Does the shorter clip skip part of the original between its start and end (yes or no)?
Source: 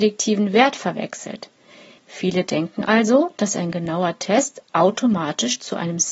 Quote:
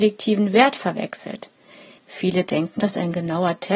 yes